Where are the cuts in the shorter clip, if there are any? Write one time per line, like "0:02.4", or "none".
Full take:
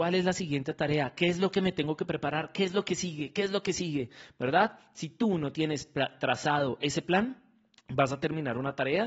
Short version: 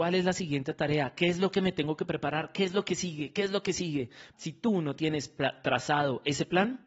0:04.3